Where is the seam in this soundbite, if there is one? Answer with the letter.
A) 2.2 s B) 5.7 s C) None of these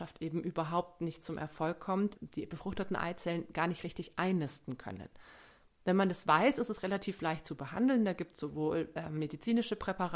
A